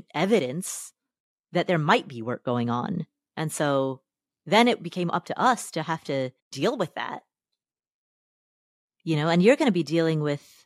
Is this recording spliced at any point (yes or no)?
yes